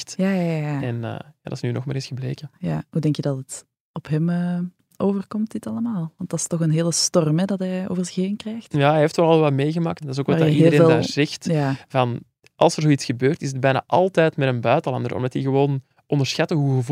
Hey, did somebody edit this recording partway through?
yes; 1 cut; at 10.0 s

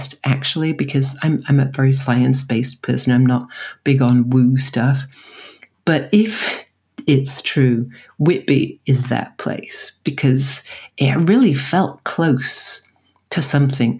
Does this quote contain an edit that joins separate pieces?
no; 0 cuts

